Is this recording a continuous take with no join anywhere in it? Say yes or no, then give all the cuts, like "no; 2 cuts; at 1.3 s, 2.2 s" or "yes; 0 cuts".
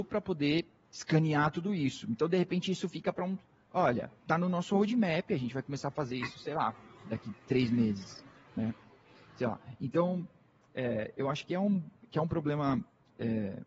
yes; 0 cuts